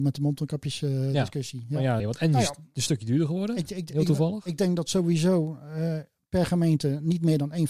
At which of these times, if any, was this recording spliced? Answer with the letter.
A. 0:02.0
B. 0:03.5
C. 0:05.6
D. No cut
A